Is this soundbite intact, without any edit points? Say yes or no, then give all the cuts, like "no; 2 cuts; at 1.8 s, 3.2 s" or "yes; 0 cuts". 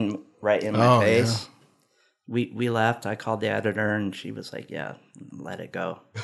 yes; 0 cuts